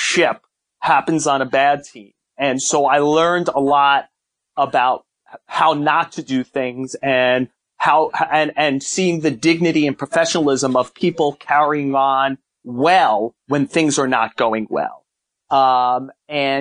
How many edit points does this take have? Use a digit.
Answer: 0